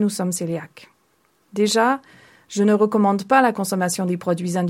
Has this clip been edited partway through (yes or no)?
yes